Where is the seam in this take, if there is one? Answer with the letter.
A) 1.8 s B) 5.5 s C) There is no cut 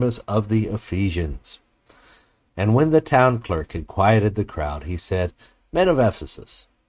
C